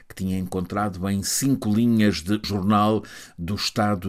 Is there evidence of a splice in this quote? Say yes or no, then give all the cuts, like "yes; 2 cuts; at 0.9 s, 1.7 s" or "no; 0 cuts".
yes; 1 cut; at 2.4 s